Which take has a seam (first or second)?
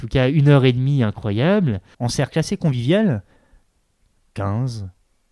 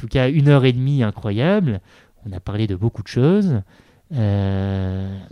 first